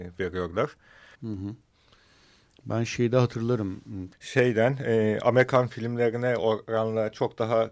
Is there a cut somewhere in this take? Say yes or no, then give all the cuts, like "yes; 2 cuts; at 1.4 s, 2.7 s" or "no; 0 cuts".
yes; 2 cuts; at 1.1 s, 4.1 s